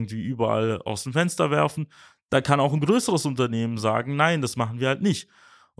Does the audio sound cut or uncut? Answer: uncut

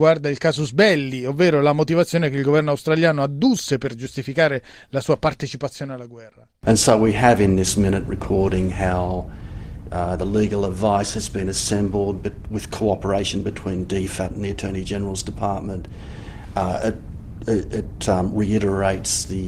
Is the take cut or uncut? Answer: cut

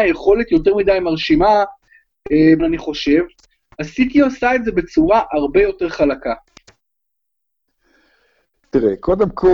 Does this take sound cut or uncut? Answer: cut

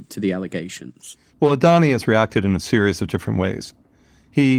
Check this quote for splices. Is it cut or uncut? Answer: uncut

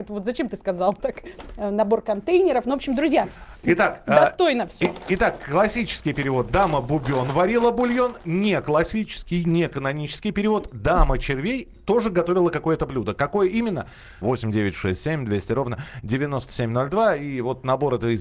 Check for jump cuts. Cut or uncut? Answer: cut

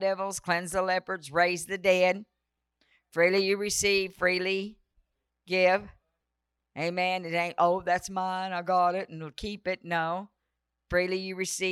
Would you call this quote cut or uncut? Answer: uncut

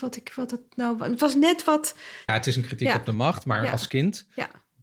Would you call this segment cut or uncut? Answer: cut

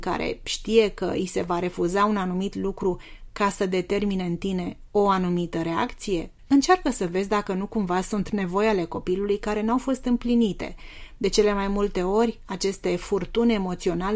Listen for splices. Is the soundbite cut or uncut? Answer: cut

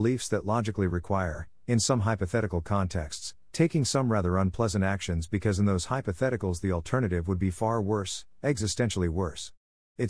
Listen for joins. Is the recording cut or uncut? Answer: uncut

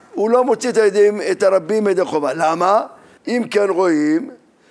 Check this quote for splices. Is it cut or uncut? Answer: cut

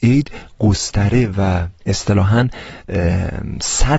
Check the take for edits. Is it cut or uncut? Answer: cut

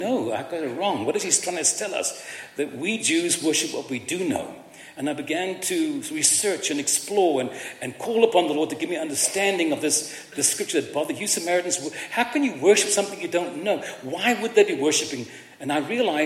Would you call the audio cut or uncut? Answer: uncut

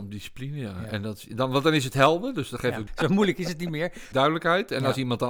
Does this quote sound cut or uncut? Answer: cut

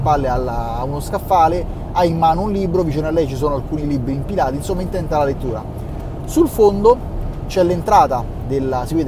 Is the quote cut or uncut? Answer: uncut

